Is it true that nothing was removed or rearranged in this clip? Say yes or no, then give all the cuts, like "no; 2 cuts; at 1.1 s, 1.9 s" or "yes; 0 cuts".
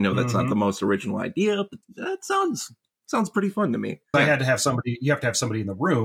no; 1 cut; at 4.1 s